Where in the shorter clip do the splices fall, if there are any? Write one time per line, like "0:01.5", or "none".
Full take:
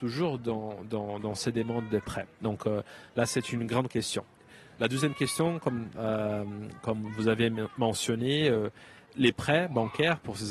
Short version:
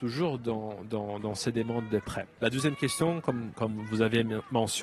0:02.4
0:03.5